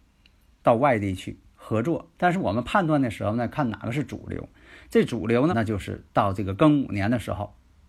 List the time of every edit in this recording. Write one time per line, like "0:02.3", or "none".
0:02.1
0:05.5